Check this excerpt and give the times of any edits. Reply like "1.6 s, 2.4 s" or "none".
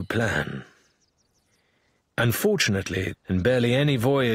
2.0 s, 3.1 s